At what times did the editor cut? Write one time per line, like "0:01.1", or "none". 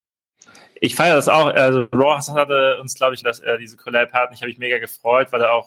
0:03.2